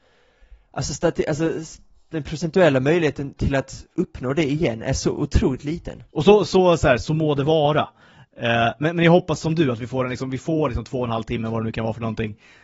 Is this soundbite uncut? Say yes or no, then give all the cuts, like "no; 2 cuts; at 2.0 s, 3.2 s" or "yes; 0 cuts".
no; 1 cut; at 6.1 s